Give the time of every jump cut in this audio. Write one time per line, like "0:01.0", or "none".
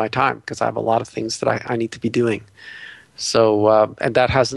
none